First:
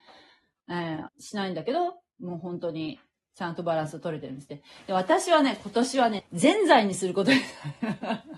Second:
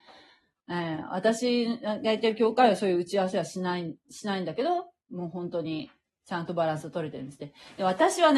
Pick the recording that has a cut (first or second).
first